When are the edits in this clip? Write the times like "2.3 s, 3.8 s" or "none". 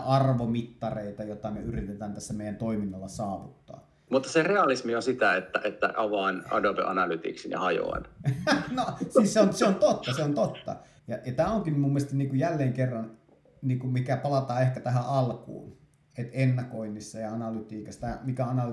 4.1 s, 11.0 s

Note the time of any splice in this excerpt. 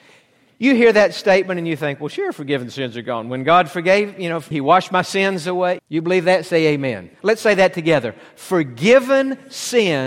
4.5 s, 5.8 s, 7.1 s

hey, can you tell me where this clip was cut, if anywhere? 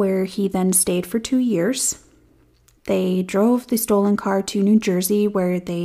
2.8 s

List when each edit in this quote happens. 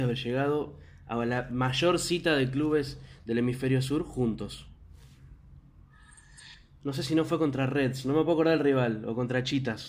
6.8 s

